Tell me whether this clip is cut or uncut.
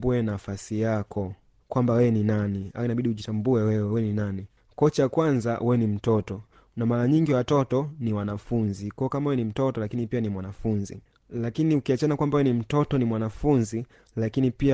uncut